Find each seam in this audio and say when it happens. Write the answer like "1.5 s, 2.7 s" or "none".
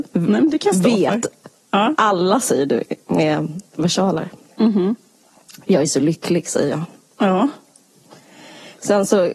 1.9 s